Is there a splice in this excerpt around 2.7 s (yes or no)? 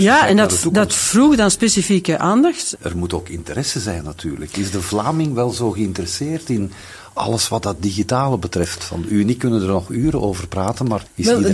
yes